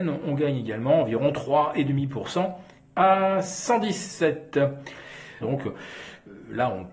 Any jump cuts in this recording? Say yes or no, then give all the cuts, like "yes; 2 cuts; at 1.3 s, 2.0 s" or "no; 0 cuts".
yes; 1 cut; at 5.4 s